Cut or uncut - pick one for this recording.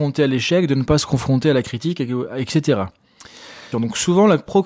cut